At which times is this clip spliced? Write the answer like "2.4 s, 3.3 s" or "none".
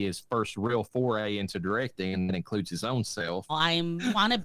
3.5 s